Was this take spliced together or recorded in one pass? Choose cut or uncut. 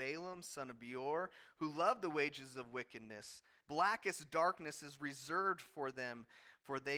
cut